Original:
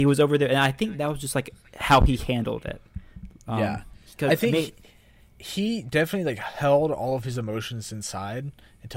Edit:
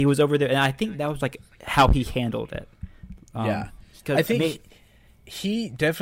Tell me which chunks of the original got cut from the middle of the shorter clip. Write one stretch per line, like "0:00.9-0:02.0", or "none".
0:01.2-0:01.3